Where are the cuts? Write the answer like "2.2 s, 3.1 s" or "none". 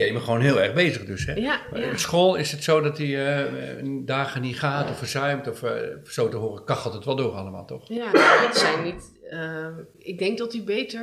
8.1 s